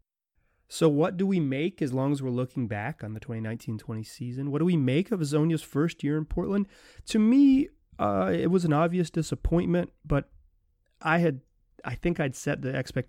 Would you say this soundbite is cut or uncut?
uncut